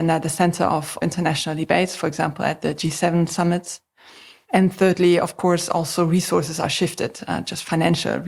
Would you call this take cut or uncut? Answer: uncut